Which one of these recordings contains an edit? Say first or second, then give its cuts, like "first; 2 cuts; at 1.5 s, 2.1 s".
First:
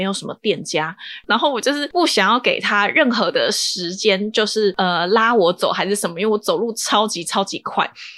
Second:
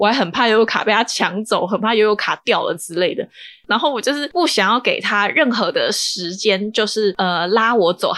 first; 1 cut; at 1.2 s